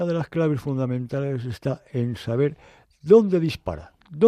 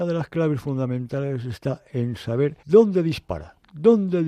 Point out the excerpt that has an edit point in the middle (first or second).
second